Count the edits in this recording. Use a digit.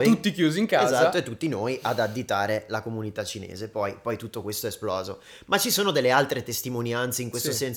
0